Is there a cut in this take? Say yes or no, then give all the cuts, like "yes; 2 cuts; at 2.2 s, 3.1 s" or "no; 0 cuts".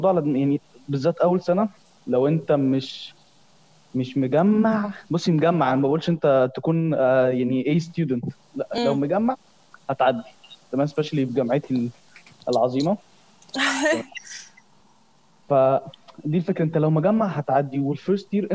no; 0 cuts